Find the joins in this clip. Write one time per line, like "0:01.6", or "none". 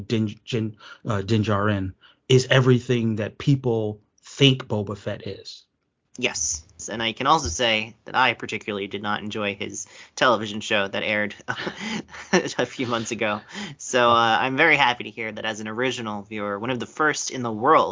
0:06.8